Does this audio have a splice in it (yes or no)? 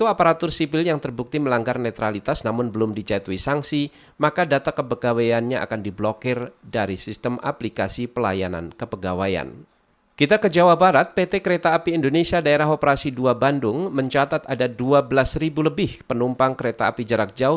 no